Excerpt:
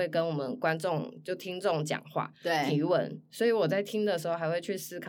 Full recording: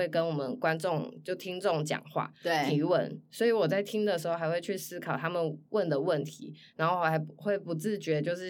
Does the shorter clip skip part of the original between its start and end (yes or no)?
no